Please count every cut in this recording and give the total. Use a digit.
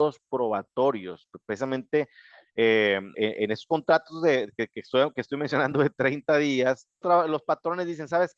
2